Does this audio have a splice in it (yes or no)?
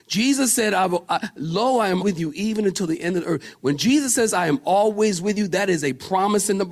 yes